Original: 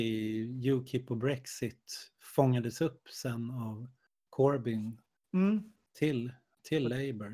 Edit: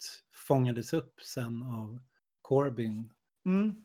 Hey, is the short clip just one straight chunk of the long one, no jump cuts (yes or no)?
yes